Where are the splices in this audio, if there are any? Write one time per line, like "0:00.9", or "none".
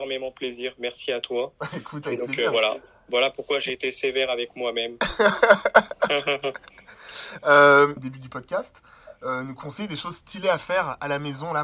0:08.0

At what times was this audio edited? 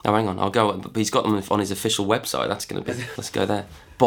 0:03.2

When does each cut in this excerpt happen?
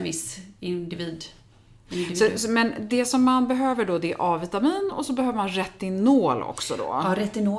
none

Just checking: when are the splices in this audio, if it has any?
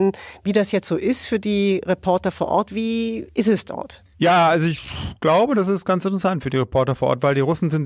0:04.1

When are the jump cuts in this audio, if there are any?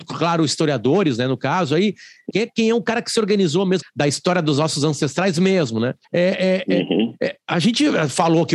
0:02.3
0:03.8
0:06.0

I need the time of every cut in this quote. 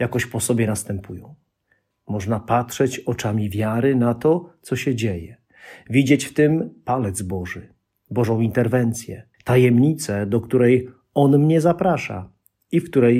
0:01.9
0:09.3

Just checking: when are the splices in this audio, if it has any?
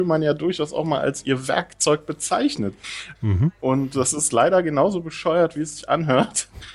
0:03.1

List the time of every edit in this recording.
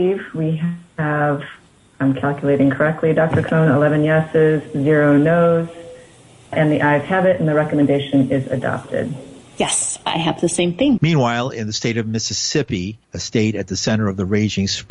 0:11.0
0:13.0

